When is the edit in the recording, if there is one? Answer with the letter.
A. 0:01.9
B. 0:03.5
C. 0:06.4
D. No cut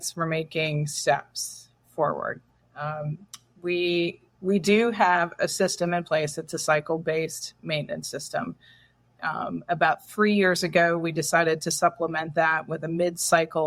D